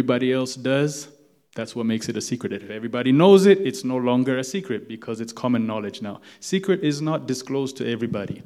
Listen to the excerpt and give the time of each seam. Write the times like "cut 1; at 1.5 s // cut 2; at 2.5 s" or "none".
none